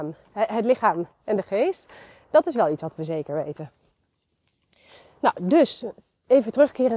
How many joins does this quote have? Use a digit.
0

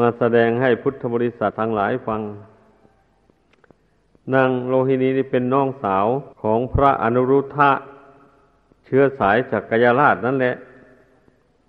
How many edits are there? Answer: 2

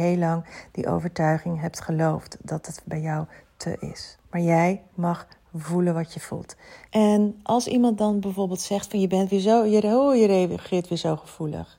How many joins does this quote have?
2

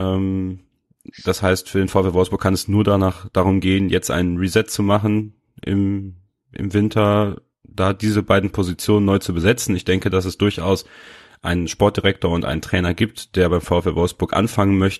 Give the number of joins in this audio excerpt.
0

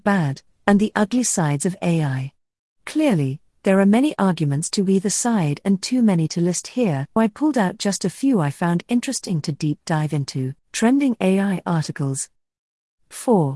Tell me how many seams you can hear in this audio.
2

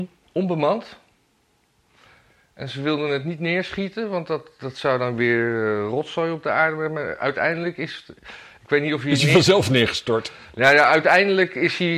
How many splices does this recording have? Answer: 0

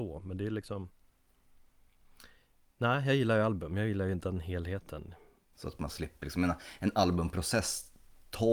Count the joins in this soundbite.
1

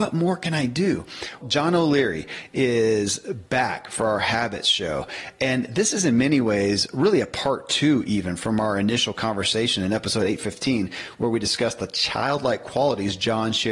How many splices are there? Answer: 1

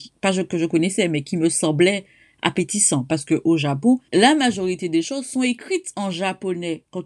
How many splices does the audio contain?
1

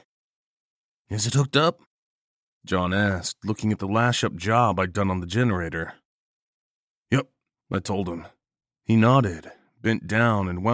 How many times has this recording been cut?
1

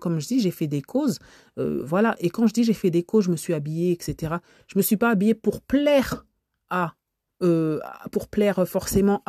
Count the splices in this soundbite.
0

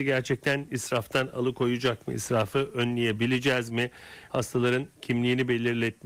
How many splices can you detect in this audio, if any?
1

